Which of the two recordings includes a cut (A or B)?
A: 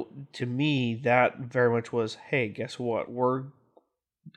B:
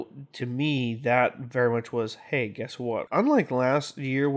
B